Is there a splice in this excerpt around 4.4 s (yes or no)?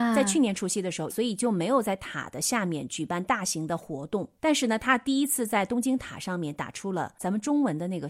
no